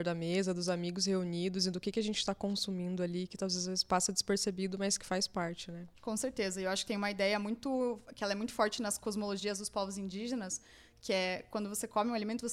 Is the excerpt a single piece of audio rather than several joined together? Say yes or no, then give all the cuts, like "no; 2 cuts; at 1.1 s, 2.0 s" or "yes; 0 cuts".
no; 1 cut; at 6.0 s